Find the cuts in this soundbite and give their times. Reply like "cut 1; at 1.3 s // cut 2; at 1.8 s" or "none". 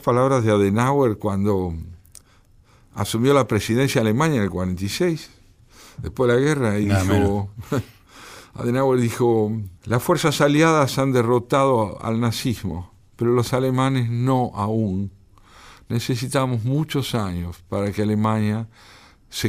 cut 1; at 9.8 s